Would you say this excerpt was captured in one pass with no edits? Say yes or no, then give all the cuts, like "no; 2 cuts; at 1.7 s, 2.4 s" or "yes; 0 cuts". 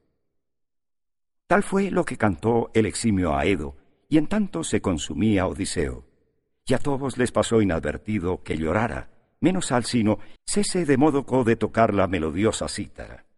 no; 1 cut; at 10.4 s